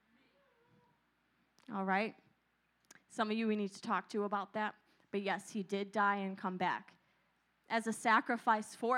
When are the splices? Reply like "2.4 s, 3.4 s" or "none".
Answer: none